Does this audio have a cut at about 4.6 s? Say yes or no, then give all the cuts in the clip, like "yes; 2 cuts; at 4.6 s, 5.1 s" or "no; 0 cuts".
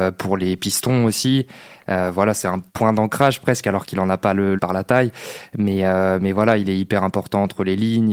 yes; 2 cuts; at 2.7 s, 4.6 s